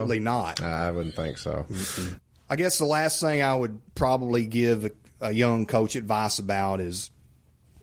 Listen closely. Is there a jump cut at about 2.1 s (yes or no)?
no